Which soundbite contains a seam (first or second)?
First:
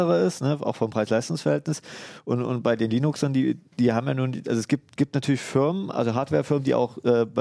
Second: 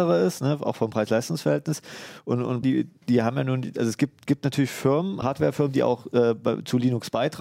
second